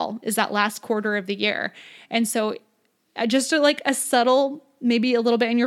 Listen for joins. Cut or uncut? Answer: uncut